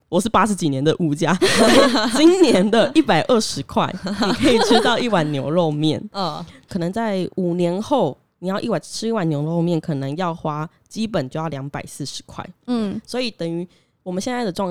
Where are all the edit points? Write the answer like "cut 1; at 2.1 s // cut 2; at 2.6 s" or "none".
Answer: cut 1; at 6.7 s